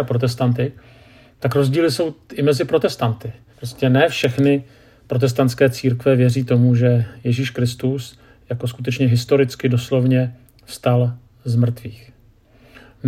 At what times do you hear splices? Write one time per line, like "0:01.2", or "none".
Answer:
0:03.5